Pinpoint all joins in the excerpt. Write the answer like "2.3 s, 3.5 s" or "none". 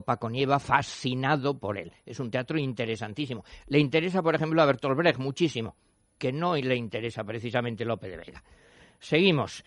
none